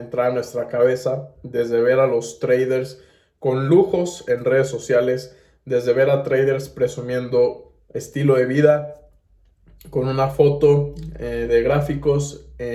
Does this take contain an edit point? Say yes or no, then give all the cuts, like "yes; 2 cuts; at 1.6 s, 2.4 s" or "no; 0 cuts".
no; 0 cuts